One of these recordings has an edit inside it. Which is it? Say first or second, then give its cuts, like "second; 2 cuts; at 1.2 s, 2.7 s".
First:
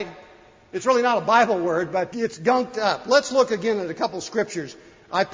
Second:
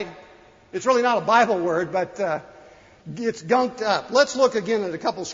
first; 1 cut; at 2.1 s